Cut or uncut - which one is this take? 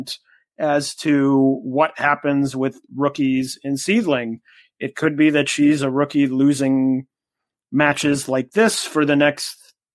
uncut